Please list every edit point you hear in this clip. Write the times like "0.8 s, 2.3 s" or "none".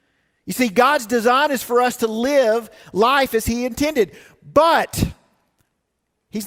none